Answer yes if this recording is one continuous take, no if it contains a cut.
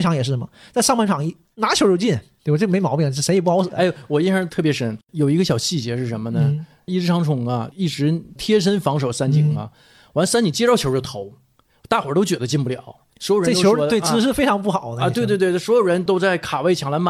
yes